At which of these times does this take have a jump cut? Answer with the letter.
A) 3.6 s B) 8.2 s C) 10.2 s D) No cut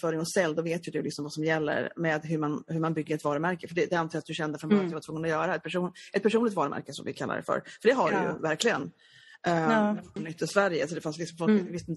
C